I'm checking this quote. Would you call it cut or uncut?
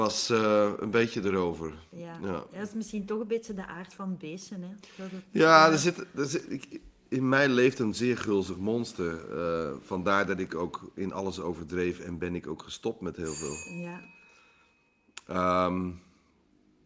uncut